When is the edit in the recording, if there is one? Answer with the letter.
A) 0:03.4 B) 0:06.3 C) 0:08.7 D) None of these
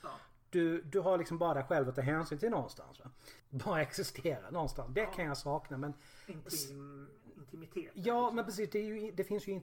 A